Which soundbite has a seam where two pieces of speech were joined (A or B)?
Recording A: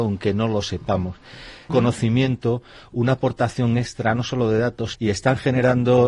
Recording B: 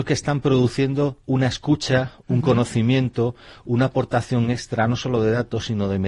A